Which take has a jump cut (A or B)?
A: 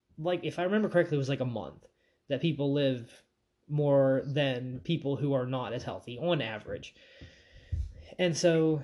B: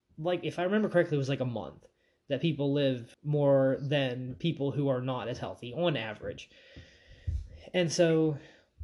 B